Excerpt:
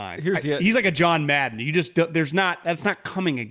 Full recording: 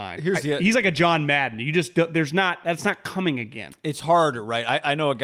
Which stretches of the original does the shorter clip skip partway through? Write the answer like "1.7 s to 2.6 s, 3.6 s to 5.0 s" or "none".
none